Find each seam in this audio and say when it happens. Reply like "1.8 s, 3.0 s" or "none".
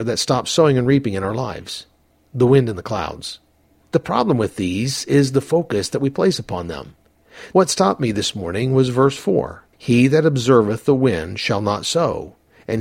7.5 s, 9.7 s